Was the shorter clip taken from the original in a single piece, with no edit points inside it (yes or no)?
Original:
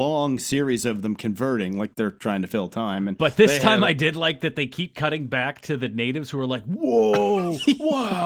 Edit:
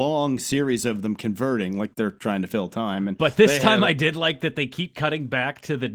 yes